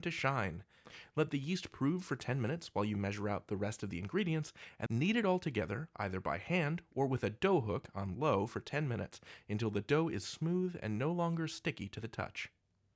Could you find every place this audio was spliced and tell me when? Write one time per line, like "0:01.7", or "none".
0:04.9